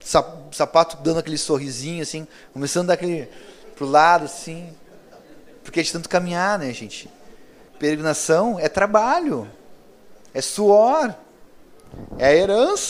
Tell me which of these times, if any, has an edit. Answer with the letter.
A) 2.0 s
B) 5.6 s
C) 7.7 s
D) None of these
C